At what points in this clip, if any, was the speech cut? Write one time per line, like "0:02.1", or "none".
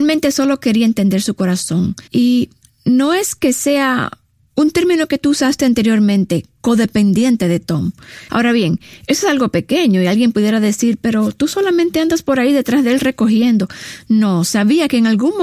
0:02.1
0:08.3